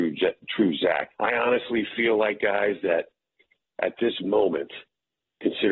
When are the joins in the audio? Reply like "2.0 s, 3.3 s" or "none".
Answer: 1.1 s